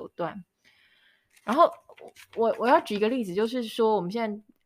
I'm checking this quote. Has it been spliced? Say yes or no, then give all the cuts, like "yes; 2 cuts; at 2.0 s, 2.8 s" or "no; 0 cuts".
no; 0 cuts